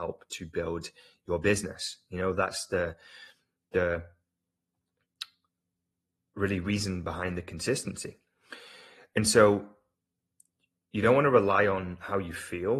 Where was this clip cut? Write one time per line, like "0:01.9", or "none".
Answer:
none